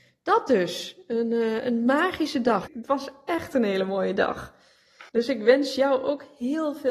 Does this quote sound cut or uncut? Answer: cut